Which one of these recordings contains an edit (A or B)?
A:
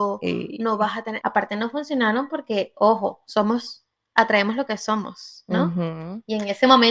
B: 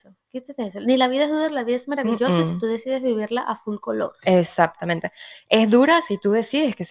A